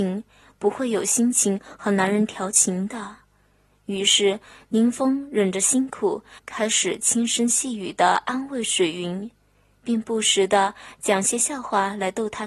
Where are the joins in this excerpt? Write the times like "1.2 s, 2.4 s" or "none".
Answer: 6.4 s